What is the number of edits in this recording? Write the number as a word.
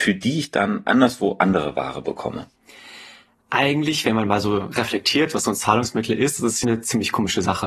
two